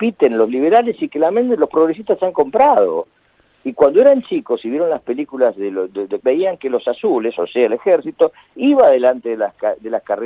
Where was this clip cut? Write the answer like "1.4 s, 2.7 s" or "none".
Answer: 6.2 s